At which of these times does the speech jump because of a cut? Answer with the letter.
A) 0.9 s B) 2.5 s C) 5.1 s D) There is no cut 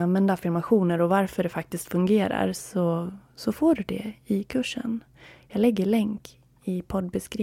D